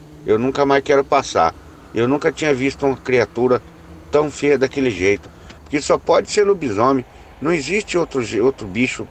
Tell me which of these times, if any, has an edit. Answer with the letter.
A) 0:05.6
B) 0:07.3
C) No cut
A